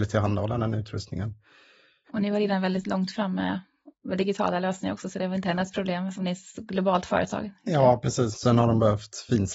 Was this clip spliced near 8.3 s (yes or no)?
yes